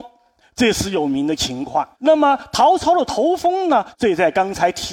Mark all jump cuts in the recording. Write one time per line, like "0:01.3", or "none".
0:01.9
0:03.9